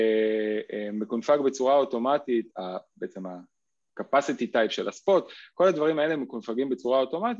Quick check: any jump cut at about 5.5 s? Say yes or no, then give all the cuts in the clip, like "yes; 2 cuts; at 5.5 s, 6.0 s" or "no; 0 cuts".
no; 1 cut; at 2.5 s